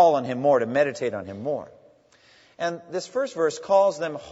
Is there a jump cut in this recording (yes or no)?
no